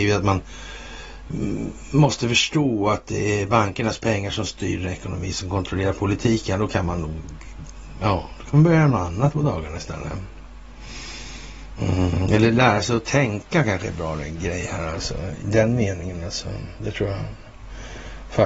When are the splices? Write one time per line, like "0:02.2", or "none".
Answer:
0:15.4